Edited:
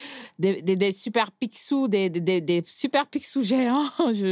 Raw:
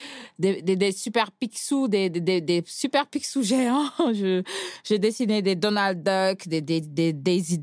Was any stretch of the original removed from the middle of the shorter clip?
no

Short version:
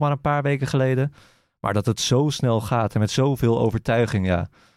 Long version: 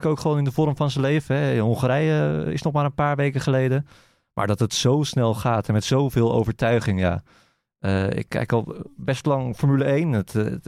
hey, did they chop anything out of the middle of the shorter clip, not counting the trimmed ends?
no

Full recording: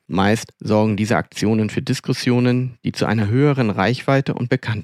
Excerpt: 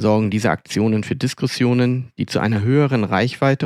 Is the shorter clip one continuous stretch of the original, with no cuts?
yes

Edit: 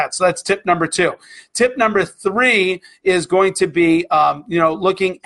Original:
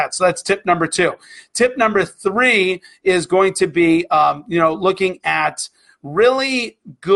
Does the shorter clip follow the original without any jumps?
yes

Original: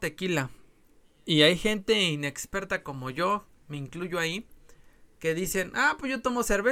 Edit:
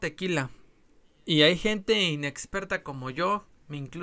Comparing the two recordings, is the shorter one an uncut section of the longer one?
yes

